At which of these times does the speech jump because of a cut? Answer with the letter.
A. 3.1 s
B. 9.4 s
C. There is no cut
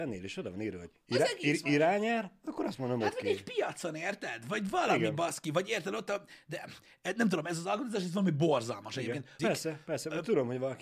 B